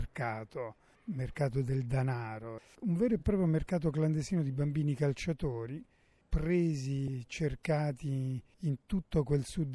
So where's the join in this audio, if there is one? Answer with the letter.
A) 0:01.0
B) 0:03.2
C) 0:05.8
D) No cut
D